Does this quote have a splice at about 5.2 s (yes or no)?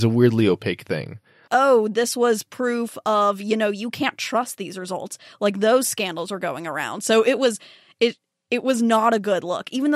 no